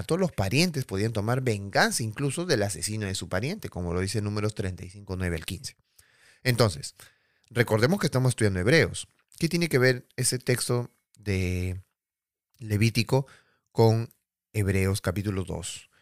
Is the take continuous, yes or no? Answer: yes